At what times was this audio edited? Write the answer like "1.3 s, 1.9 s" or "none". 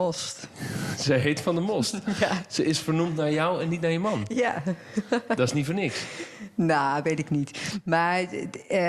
none